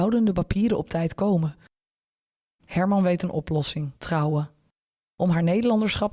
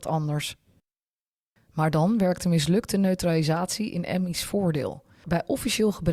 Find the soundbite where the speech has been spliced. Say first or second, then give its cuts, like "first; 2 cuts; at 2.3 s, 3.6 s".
first; 2 cuts; at 2.6 s, 4.0 s